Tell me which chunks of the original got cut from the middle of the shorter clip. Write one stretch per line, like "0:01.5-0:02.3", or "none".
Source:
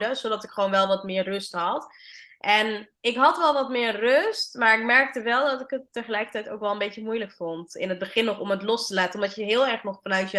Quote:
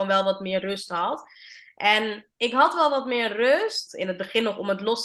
0:04.5-0:07.7